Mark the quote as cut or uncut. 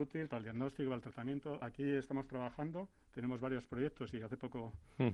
uncut